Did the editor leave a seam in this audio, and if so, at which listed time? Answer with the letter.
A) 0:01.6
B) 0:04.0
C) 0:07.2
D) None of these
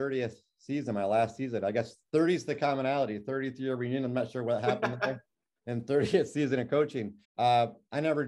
C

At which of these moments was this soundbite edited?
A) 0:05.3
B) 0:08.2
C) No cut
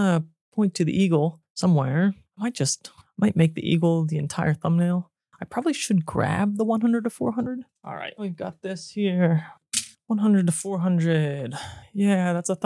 B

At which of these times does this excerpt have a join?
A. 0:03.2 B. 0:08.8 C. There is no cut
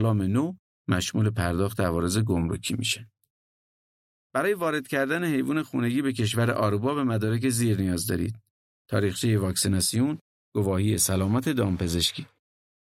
C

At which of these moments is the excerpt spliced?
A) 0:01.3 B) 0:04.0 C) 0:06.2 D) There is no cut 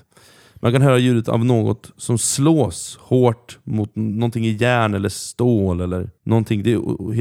C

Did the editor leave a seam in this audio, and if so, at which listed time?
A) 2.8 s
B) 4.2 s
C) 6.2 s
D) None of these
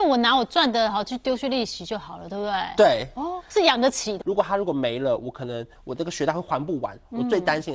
B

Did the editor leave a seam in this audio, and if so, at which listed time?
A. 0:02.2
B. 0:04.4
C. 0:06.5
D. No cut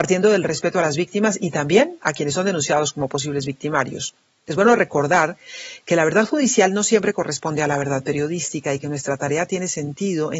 D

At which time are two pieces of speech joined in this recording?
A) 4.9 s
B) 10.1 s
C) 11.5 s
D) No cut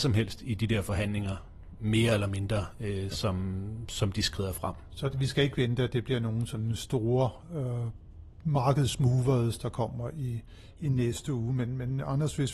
D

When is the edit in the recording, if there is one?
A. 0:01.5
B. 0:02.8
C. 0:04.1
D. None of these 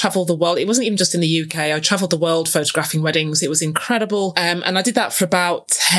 D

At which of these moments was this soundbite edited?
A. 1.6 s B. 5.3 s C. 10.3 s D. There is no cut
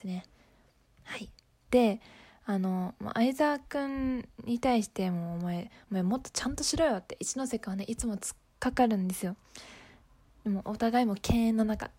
A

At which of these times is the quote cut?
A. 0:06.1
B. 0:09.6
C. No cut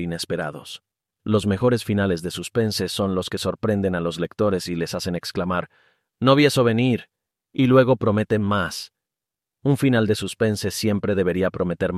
A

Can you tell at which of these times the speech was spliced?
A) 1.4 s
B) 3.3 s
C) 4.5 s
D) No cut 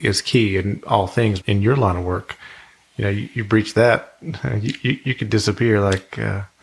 A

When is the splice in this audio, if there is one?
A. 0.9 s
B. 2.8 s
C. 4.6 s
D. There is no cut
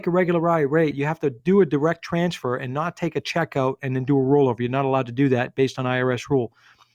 A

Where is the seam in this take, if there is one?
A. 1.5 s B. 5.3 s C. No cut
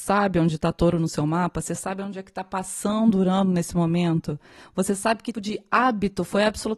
B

